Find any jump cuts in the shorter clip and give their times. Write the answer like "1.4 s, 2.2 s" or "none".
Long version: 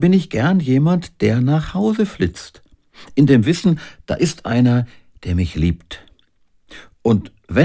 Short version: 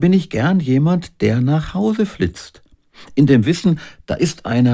none